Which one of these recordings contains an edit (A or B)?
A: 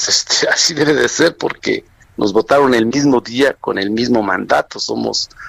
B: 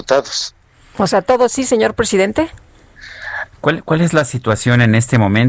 B